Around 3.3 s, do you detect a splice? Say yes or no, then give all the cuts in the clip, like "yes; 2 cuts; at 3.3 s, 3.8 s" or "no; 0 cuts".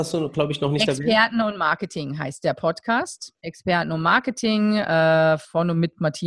yes; 1 cut; at 3.3 s